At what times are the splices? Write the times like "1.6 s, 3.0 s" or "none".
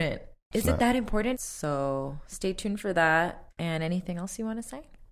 1.3 s